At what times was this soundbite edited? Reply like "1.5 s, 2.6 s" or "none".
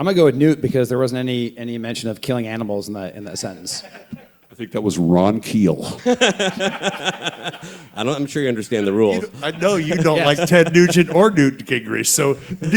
none